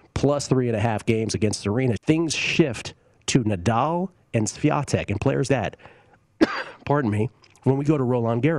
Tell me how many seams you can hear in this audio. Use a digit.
2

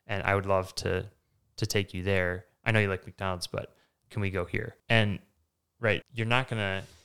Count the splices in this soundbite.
2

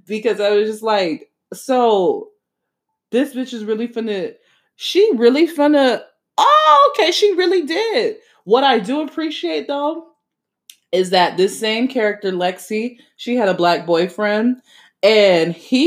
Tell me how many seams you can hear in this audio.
1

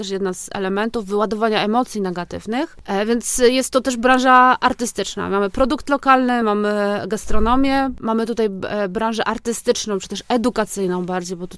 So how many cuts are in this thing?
0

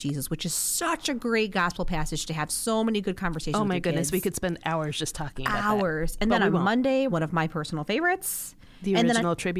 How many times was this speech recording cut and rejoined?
1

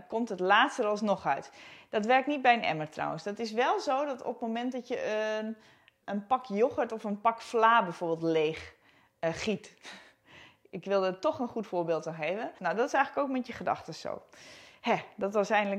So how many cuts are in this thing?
2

